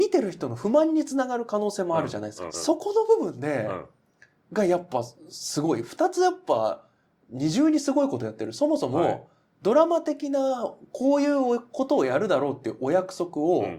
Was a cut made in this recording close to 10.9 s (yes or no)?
no